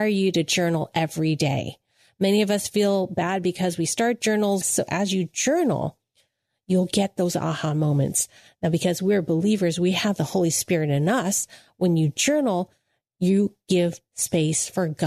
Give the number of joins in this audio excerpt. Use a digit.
1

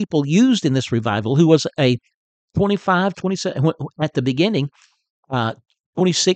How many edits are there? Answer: 1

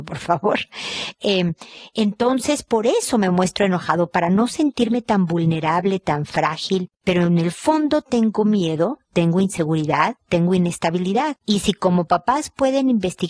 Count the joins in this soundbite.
0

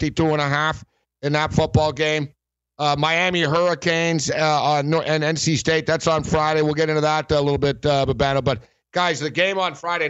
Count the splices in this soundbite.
0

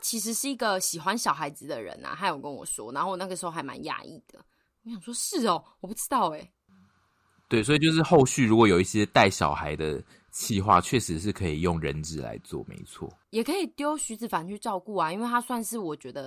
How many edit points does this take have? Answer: 0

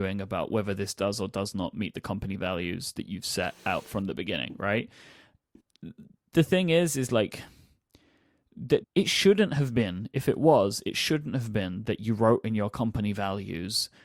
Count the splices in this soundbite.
1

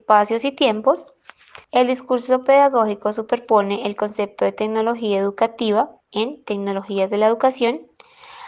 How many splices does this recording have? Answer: 2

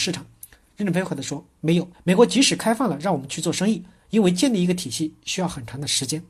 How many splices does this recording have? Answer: 2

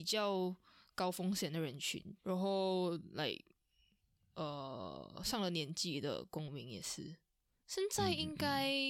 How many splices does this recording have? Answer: 1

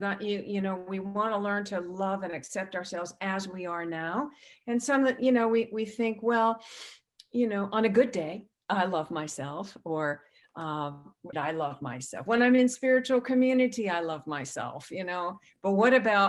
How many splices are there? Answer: 1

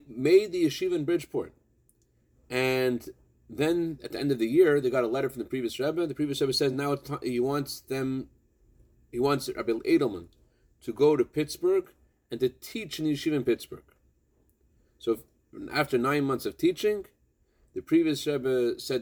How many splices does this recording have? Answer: 0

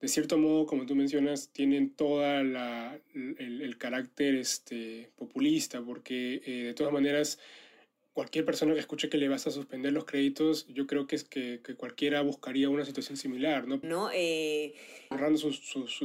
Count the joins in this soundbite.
2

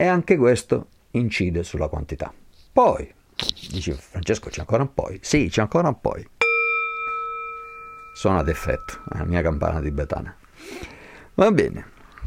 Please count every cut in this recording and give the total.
0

